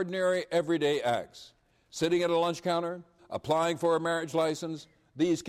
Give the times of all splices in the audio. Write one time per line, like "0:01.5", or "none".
0:03.2